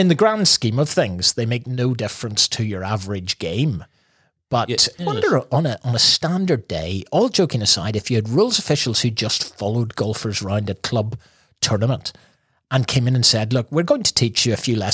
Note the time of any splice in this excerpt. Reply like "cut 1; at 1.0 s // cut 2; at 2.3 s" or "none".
cut 1; at 5.0 s

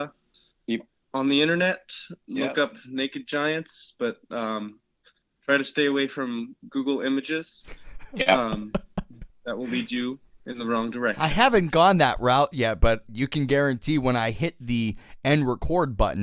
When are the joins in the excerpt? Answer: none

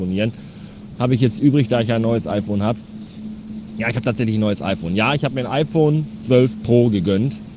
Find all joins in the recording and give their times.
cut 1; at 1.0 s

